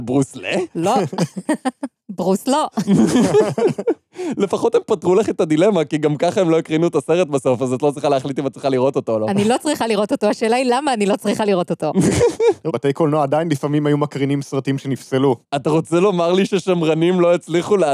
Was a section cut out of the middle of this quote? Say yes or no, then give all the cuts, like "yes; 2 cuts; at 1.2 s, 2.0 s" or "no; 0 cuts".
yes; 2 cuts; at 12.7 s, 15.4 s